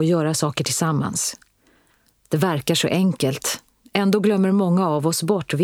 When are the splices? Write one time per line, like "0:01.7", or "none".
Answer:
none